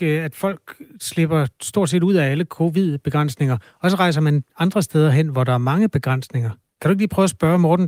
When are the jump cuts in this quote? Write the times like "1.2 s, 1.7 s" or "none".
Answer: none